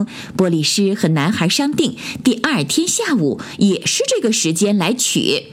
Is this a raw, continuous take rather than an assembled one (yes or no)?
yes